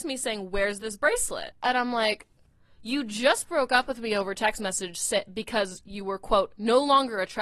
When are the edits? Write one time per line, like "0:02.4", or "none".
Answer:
0:01.5